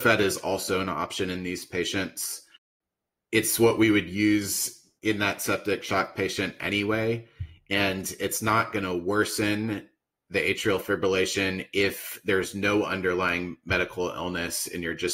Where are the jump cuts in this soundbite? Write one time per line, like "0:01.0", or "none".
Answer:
0:05.0

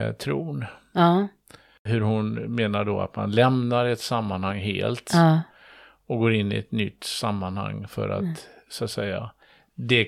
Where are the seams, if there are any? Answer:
0:01.8

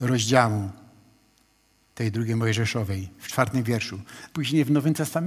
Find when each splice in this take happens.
0:04.3

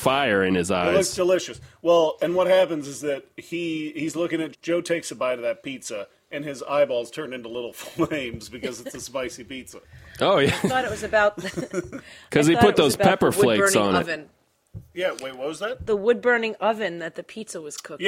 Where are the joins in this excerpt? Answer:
0:04.5

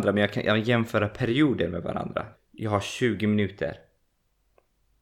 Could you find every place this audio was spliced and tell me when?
0:02.3

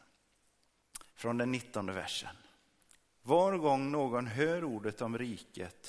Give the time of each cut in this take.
0:01.1

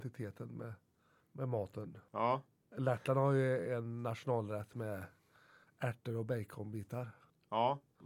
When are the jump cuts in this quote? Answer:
none

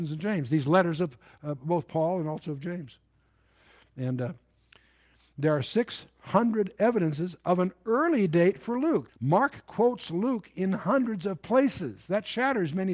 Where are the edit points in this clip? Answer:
0:09.1

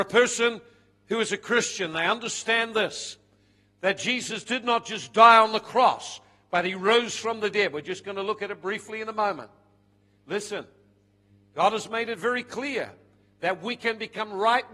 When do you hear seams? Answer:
none

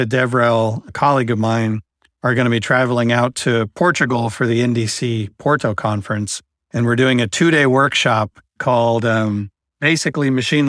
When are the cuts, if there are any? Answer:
none

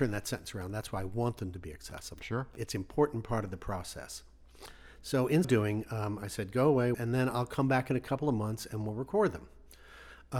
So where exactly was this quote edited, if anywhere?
0:05.4
0:06.9

